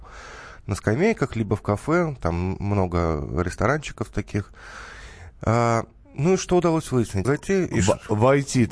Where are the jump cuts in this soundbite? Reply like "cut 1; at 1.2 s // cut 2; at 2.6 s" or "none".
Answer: cut 1; at 7.2 s